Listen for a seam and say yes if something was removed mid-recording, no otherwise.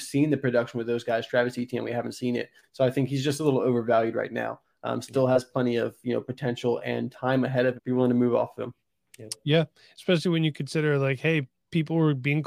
yes